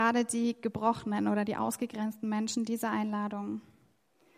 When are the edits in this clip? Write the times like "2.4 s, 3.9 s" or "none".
none